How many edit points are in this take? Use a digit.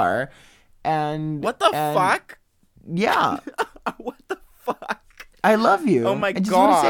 0